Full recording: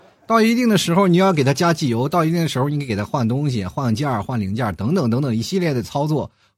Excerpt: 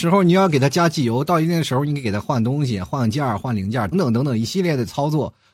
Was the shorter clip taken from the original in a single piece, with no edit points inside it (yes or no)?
no